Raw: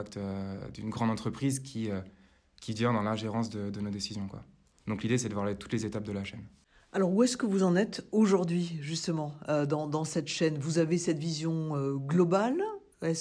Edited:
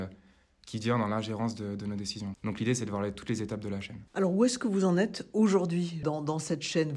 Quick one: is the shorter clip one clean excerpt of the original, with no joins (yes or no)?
no